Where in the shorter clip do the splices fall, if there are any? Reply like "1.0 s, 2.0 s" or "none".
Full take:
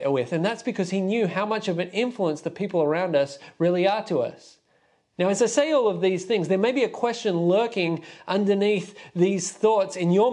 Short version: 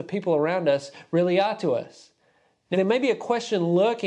2.7 s